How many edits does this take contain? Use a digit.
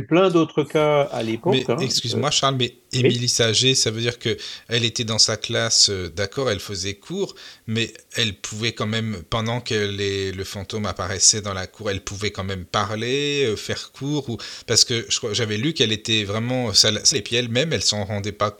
1